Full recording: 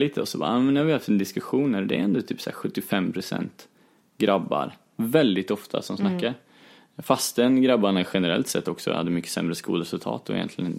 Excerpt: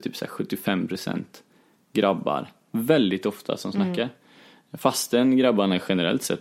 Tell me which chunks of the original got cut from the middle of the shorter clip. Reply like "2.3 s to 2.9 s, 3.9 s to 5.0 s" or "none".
none